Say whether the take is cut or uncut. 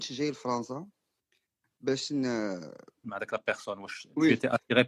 cut